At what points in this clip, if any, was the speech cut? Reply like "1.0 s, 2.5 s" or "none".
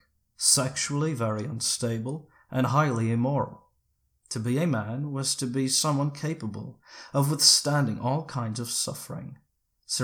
4.2 s